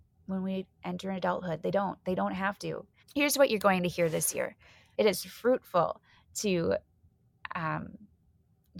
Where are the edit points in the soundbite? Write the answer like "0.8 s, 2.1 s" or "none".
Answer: 3.0 s, 4.9 s